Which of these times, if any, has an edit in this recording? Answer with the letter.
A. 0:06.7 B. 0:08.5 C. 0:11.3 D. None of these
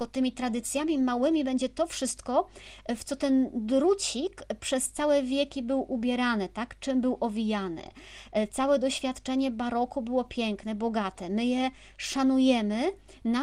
D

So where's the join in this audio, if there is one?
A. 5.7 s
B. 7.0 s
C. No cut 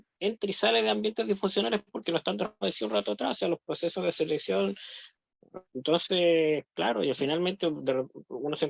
A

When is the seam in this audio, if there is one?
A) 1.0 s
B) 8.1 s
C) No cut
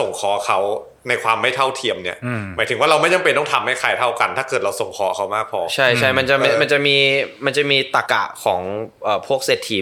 B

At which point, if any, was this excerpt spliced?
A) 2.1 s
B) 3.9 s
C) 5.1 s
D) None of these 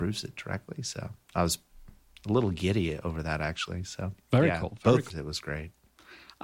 C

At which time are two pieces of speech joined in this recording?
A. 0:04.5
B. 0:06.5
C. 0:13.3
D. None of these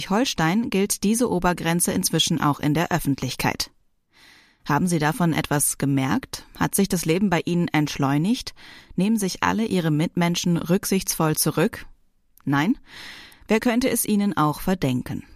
D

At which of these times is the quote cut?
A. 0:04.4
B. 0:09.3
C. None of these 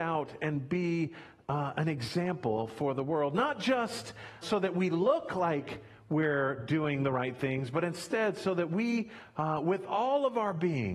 A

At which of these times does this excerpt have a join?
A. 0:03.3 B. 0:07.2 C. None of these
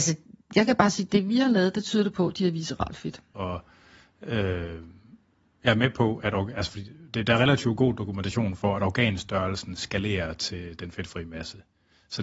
A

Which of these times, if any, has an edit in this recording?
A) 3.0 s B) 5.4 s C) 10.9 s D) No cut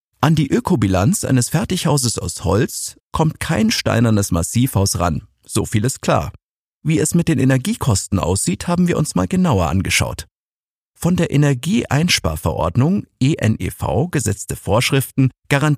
A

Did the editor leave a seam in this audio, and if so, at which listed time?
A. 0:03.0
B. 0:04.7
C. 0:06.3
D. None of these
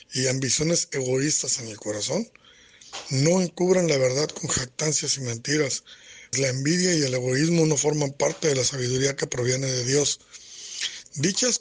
C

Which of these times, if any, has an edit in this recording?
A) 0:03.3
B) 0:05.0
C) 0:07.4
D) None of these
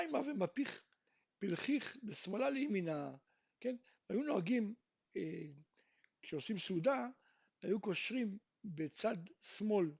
B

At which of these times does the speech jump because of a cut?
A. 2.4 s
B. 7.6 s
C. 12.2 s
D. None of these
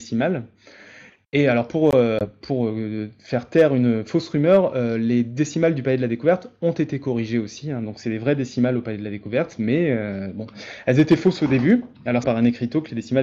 C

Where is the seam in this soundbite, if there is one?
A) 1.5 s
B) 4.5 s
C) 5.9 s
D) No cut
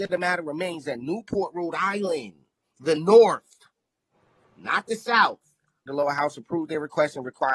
C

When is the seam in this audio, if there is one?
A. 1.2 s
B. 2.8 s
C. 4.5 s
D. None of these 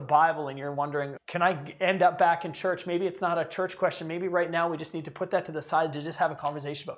A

